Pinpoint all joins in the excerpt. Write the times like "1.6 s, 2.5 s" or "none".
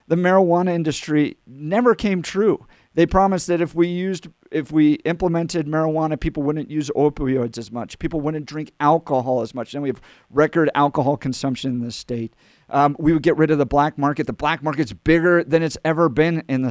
none